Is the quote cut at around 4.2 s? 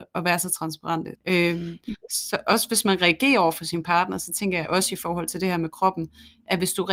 no; 1 cut; at 1.1 s

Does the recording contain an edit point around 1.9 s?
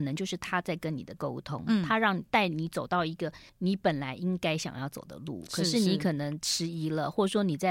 no; 1 cut; at 3.5 s

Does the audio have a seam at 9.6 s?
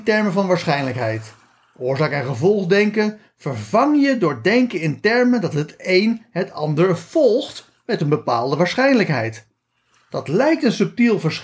no; 0 cuts

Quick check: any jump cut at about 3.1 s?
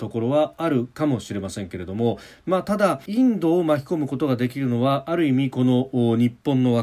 yes; 1 cut; at 3.1 s

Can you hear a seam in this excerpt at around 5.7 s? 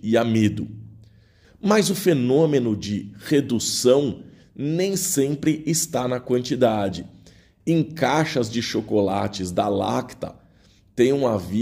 no; 2 cuts; at 1.4 s, 7.6 s

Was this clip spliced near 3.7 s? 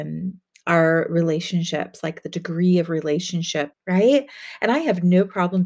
yes; 1 cut; at 3.7 s

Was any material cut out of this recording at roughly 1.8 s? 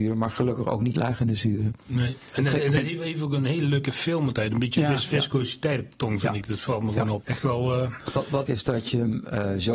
no; 2 cuts; at 7.2 s, 8.5 s

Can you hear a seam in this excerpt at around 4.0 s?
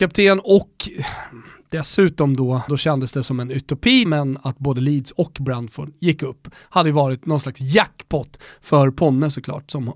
yes; 2 cuts; at 2.7 s, 4.0 s

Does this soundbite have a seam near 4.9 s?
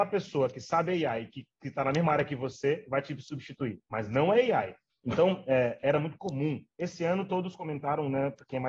yes; 1 cut; at 4.9 s

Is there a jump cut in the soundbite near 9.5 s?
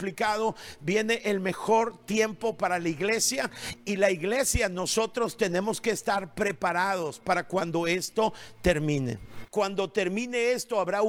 yes; 1 cut; at 9.5 s

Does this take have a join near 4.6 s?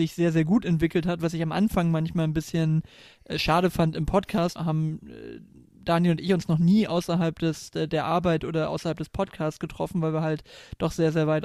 yes; 1 cut; at 4.6 s

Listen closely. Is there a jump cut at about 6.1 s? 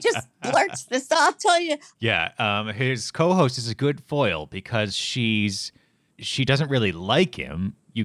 yes; 2 cuts; at 1.9 s, 6.1 s

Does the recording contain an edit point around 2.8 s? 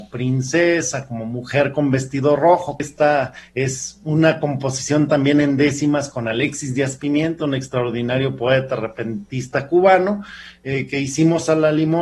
yes; 1 cut; at 2.8 s

